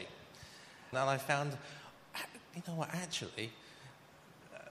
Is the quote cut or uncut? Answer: cut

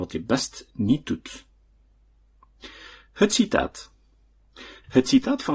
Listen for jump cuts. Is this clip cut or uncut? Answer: uncut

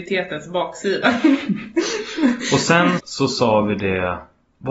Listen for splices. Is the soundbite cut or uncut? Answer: cut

